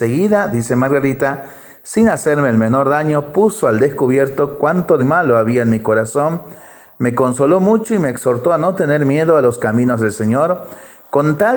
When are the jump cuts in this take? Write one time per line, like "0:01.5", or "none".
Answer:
0:05.0